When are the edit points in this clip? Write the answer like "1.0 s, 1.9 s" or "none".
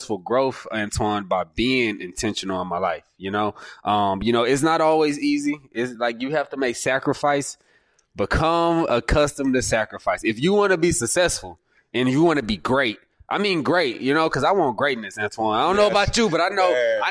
none